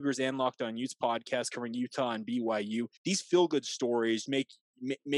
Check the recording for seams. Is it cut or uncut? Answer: cut